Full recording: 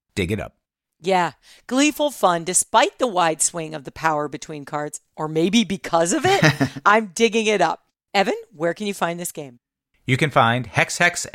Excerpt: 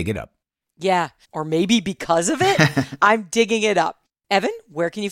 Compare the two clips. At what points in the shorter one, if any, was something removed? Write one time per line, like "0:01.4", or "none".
0:01.2